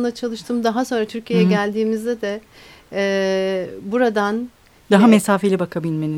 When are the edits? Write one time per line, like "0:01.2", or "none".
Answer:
none